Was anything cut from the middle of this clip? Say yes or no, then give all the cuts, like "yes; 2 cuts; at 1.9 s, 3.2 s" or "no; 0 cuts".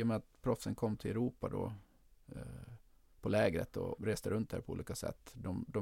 yes; 1 cut; at 4.0 s